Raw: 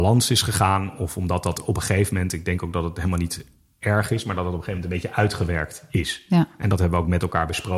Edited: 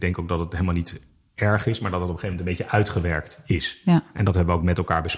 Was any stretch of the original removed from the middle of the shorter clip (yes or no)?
no